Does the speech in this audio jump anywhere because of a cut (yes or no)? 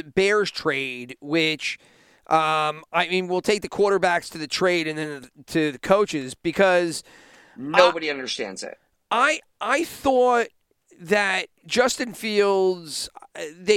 no